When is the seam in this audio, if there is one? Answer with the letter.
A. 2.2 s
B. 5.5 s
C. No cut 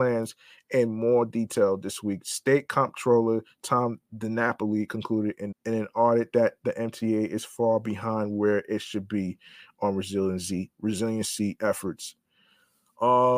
B